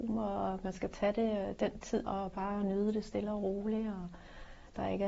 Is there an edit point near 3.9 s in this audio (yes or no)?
no